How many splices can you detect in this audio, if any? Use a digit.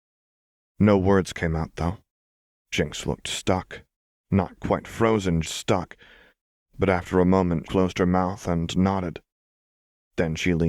2